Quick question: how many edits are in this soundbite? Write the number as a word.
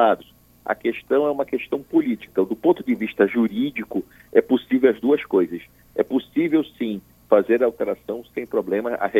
one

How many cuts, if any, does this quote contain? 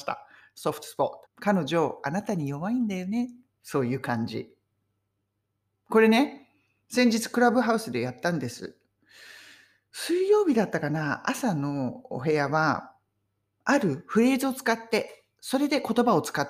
one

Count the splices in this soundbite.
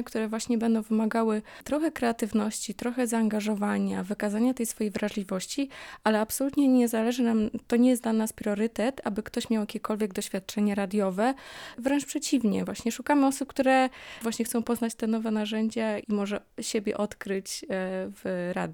one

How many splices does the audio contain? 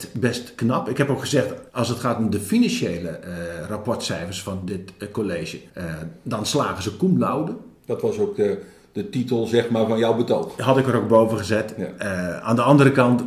two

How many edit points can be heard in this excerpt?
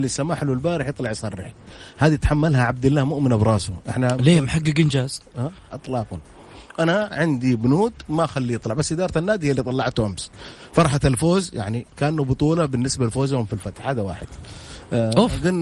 one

